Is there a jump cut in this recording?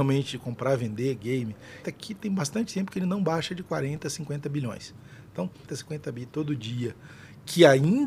yes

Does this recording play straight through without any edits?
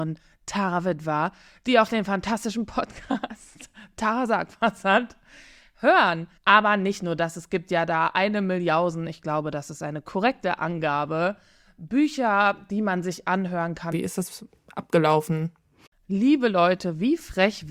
no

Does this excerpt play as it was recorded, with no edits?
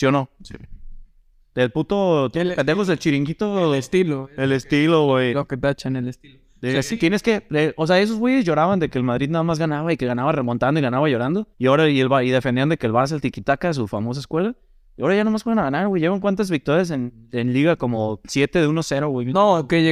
no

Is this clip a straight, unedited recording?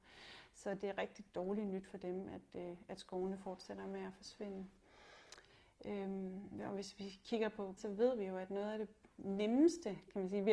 no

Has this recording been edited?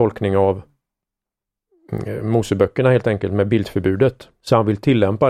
no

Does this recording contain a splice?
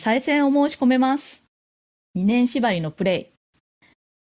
yes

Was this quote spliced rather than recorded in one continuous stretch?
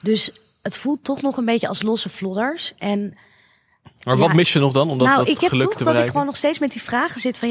no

